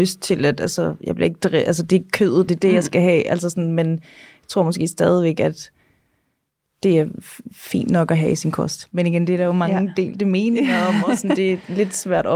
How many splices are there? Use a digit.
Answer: 1